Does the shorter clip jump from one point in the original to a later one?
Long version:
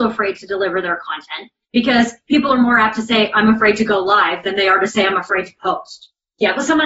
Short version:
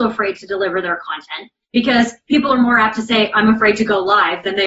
no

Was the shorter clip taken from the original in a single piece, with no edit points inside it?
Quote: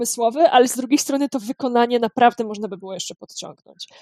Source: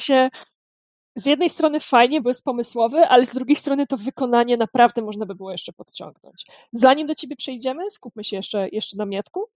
yes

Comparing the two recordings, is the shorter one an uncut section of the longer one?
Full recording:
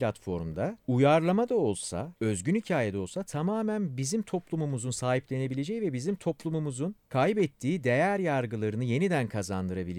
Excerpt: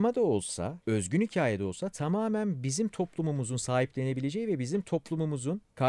yes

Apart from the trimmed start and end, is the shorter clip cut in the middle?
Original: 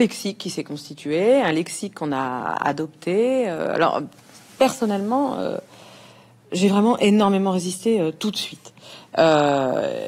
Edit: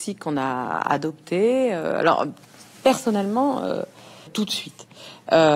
yes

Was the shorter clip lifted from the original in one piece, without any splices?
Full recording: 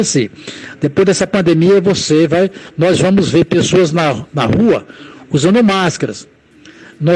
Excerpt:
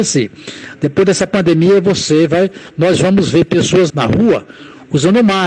no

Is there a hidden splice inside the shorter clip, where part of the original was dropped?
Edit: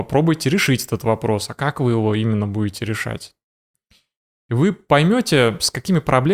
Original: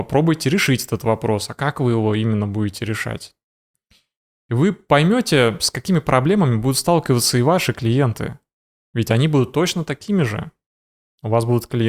no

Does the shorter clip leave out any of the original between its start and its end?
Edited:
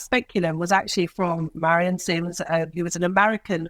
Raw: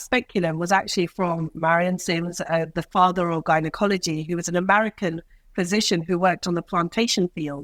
yes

